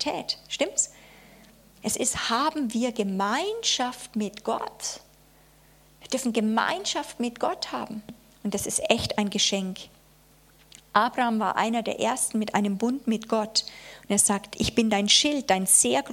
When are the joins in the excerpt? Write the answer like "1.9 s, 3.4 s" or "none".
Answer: none